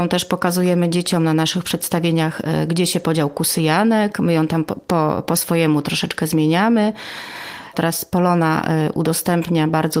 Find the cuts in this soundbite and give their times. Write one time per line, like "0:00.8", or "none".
0:07.7